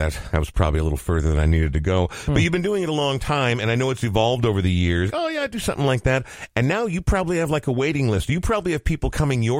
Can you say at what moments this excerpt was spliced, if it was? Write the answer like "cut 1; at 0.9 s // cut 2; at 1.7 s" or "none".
cut 1; at 5.1 s

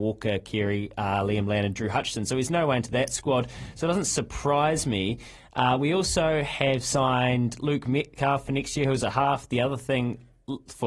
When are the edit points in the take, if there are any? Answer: none

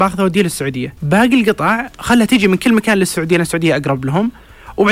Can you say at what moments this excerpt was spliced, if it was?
cut 1; at 1.0 s

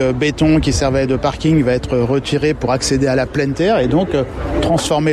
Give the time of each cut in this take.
none

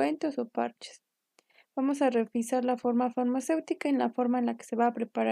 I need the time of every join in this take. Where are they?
none

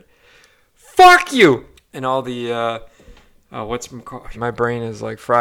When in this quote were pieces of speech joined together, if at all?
cut 1; at 1.8 s // cut 2; at 4.3 s

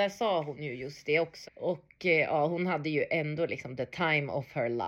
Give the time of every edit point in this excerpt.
cut 1; at 1.4 s

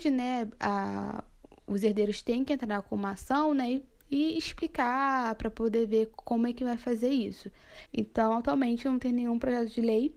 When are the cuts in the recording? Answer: cut 1; at 7.9 s

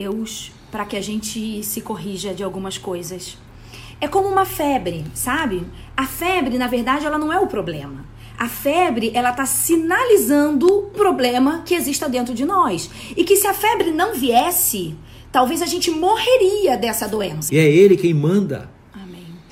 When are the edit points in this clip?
cut 1; at 10.9 s // cut 2; at 17.5 s

